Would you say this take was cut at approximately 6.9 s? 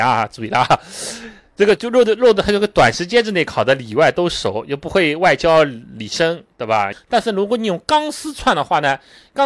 yes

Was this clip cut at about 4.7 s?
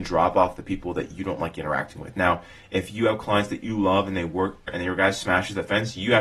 yes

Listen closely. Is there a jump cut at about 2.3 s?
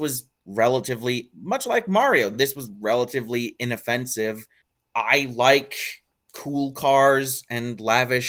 no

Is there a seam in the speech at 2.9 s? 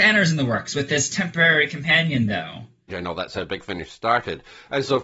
yes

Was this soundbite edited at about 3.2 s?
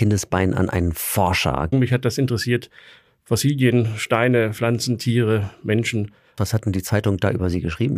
no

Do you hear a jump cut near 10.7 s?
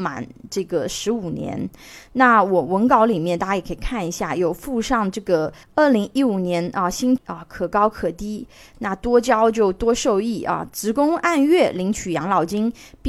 no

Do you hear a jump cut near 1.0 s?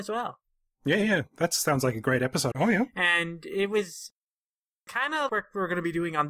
no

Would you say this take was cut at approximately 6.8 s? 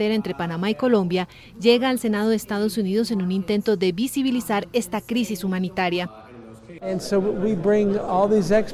yes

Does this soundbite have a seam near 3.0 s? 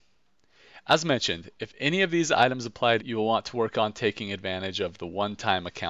yes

